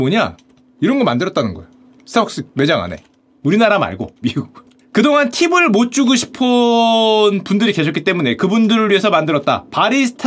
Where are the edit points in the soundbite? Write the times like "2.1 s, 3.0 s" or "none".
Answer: 4.2 s